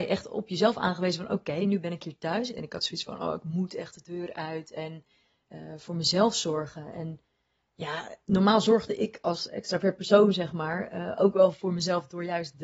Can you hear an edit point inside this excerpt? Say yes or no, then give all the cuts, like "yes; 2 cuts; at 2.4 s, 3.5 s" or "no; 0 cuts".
yes; 1 cut; at 2.5 s